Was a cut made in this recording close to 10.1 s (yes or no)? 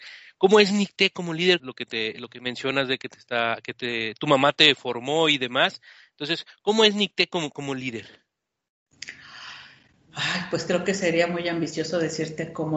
no